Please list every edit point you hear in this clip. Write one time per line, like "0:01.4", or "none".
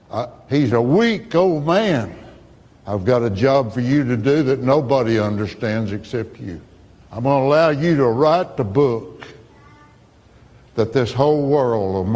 0:02.7
0:07.0